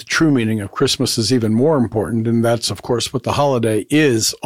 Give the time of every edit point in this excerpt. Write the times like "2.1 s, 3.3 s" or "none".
none